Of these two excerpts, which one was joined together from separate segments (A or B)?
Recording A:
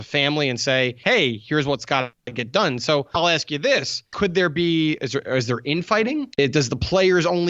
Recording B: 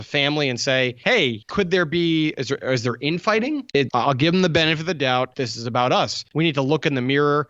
B